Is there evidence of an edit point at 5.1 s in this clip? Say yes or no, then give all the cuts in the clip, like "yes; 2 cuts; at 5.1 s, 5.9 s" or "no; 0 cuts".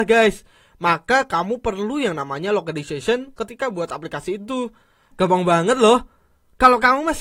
yes; 1 cut; at 5.1 s